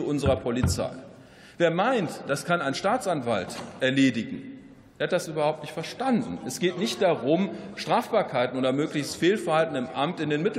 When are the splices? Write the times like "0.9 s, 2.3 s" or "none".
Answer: none